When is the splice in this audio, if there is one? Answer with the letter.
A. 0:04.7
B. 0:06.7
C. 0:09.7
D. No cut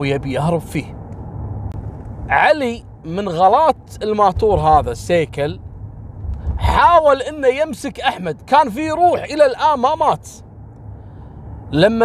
D